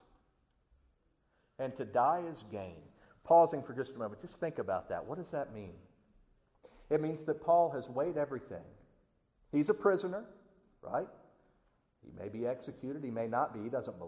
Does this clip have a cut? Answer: no; 0 cuts

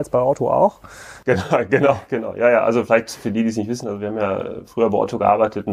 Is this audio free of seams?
yes; 0 cuts

